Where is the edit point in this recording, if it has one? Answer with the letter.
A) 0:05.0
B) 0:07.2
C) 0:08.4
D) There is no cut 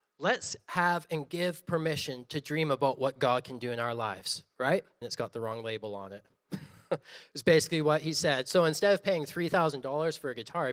A